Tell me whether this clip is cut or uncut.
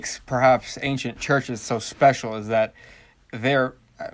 uncut